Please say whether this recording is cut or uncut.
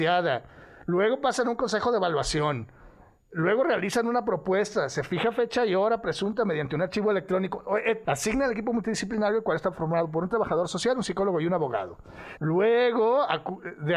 cut